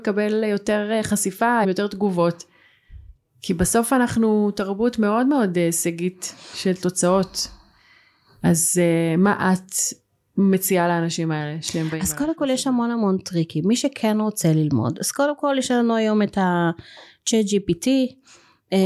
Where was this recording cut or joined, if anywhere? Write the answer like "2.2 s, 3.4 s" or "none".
1.6 s